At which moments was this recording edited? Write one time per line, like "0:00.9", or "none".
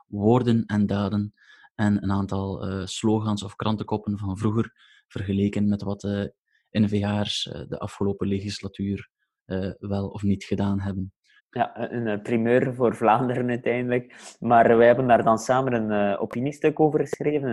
0:11.4